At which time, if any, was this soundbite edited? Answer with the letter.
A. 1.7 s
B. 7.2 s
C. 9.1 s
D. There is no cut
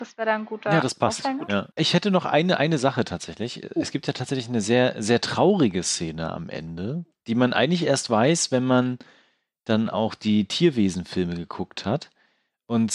A